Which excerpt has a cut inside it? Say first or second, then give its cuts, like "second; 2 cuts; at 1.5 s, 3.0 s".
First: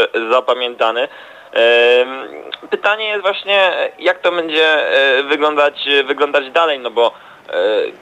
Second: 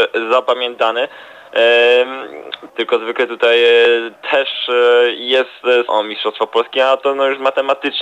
second; 2 cuts; at 2.7 s, 5.9 s